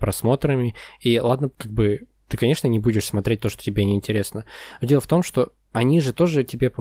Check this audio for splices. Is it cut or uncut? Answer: cut